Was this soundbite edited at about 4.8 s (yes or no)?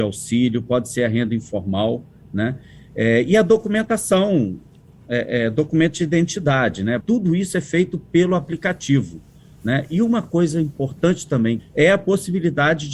no